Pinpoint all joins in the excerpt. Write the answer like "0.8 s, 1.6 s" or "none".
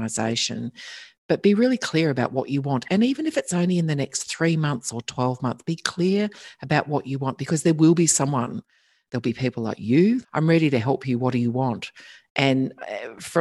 10.2 s